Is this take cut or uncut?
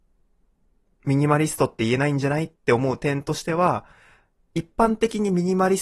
uncut